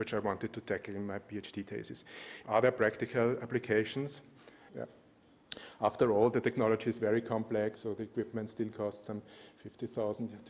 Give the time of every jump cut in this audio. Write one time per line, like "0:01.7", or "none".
0:02.4
0:04.7
0:07.7